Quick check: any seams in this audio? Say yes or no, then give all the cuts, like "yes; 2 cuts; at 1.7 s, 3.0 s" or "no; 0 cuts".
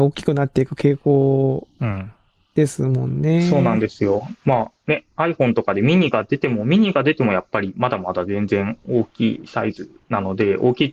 no; 0 cuts